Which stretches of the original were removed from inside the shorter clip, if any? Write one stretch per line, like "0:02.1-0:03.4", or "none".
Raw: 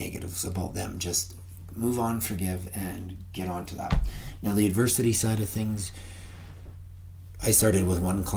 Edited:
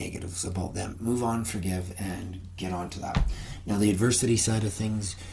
0:00.9-0:01.7

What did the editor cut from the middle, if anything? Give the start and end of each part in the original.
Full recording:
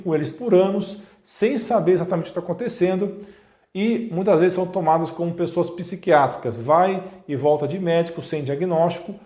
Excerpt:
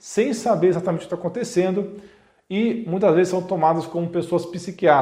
none

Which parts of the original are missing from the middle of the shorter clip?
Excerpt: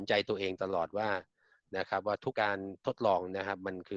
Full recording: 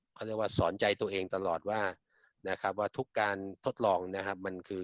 0:03.0-0:03.1

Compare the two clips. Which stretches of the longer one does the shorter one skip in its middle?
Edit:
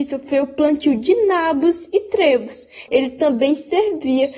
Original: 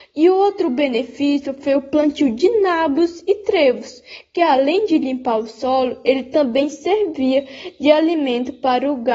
0:04.2-0:06.0

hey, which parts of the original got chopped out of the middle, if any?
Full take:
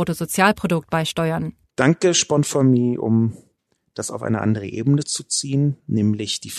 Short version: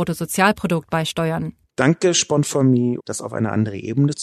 0:03.0-0:03.9

